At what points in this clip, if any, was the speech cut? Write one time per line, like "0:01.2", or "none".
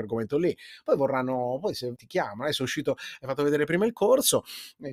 0:02.0